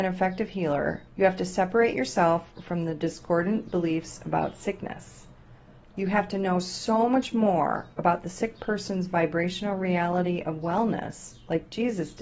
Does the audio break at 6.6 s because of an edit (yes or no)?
no